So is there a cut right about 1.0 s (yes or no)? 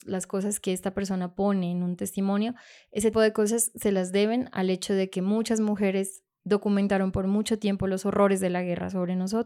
no